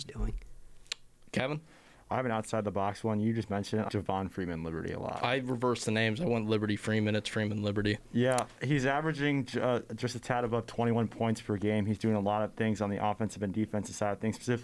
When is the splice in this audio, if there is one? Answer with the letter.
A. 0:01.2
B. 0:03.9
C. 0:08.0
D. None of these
B